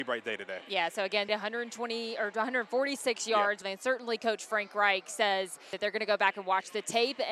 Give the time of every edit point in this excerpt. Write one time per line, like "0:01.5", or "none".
0:01.3
0:03.6